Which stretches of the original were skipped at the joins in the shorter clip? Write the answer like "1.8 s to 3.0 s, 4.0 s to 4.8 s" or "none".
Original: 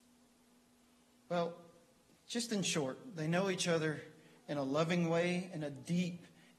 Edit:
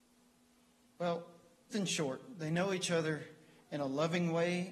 2.0 s to 2.5 s